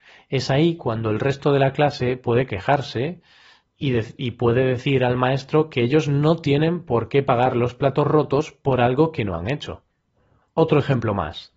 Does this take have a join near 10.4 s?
no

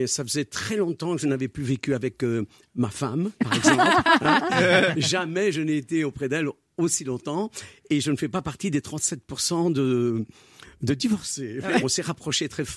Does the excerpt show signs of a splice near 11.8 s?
yes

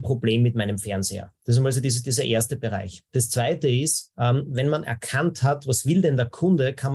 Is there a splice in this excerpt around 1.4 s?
yes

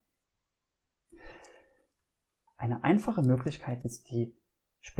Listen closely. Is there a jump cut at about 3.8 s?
yes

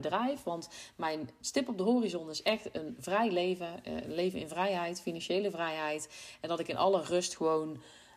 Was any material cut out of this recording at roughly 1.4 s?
yes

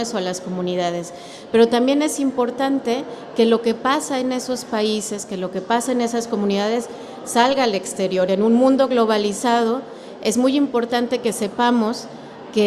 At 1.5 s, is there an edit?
no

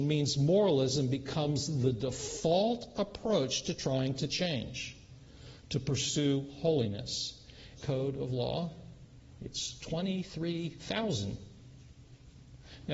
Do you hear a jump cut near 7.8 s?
yes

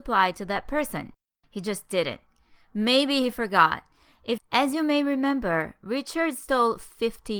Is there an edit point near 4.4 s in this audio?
yes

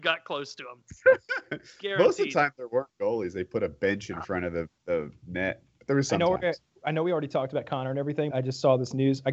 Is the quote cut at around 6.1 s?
no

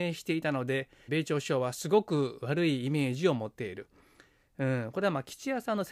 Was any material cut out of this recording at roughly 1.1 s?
yes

